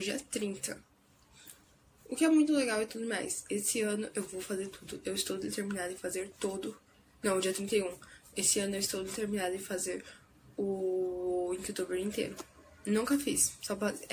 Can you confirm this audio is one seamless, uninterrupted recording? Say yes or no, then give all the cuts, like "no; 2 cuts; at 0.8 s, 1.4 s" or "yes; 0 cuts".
yes; 0 cuts